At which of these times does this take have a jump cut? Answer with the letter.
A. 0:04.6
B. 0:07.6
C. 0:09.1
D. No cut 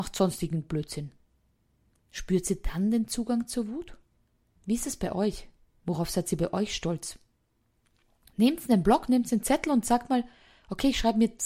A